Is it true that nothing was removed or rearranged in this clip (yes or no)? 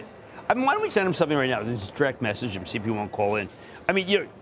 no